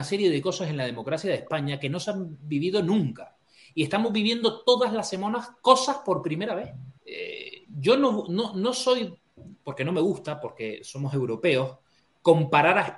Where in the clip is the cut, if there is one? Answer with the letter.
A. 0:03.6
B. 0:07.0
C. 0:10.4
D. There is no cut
B